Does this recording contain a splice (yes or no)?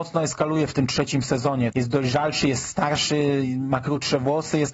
yes